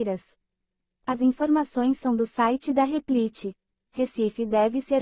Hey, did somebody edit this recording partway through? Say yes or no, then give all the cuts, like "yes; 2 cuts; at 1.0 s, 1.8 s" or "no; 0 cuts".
yes; 1 cut; at 3.9 s